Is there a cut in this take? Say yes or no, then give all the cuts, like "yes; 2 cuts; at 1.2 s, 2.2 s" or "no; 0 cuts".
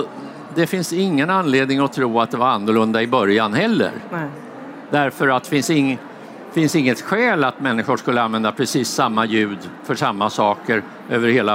yes; 1 cut; at 4.9 s